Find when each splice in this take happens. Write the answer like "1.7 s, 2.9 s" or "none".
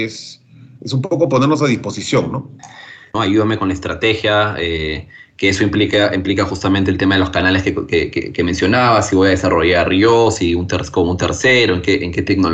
3.1 s